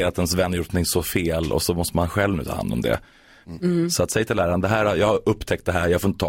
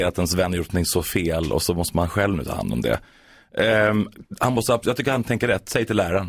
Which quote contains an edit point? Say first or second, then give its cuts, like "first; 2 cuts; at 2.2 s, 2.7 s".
first; 1 cut; at 3.4 s